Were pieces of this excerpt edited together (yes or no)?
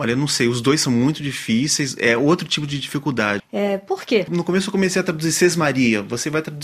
yes